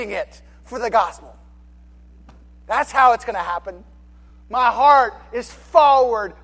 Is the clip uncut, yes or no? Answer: yes